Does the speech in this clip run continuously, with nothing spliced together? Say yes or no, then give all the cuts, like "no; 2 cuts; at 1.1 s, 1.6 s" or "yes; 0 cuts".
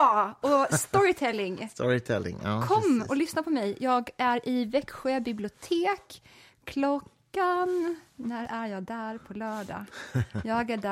yes; 0 cuts